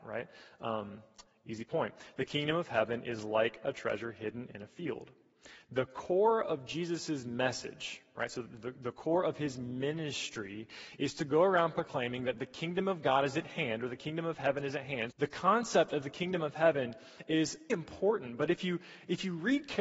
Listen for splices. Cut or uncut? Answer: cut